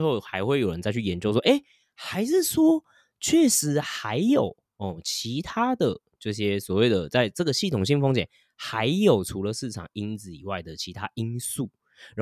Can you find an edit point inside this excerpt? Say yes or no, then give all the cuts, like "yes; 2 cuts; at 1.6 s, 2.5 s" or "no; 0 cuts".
no; 0 cuts